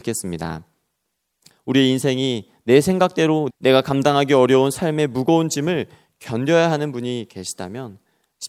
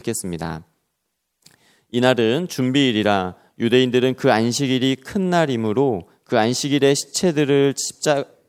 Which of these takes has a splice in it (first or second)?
first